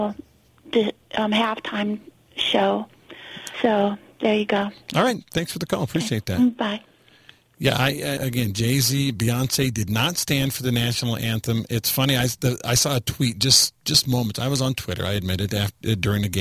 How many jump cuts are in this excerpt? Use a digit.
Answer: 2